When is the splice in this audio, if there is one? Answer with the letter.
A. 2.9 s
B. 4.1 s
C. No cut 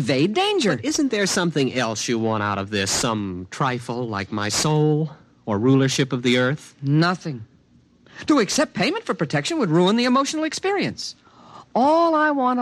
C